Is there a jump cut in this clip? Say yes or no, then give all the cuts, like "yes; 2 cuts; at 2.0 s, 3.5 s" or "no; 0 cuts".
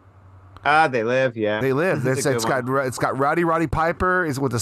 no; 0 cuts